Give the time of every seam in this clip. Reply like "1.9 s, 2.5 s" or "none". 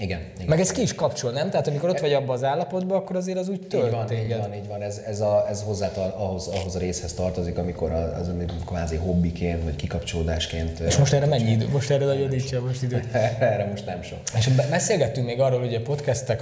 none